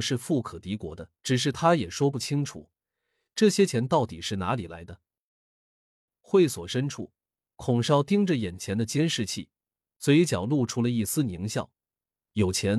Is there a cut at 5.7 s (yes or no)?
no